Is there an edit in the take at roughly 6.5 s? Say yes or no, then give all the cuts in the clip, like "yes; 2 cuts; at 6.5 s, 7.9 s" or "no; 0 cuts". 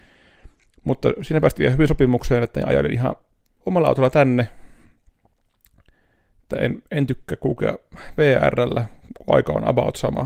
no; 1 cut; at 3.6 s